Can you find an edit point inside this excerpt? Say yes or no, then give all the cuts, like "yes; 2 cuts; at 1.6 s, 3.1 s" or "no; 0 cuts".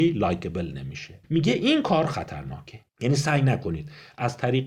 yes; 2 cuts; at 1.2 s, 2.9 s